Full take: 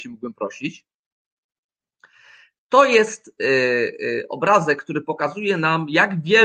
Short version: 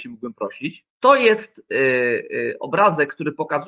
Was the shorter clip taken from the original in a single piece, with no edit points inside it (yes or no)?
no